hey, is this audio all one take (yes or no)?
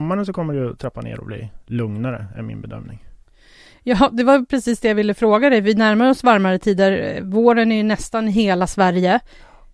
yes